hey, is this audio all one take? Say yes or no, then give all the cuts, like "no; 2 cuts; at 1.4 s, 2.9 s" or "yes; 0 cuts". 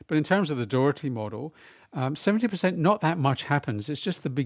yes; 0 cuts